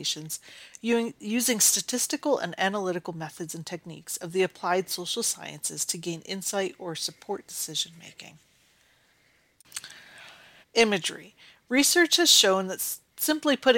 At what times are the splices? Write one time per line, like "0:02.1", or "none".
0:10.6